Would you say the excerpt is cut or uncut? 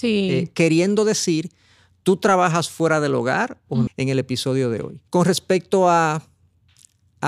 cut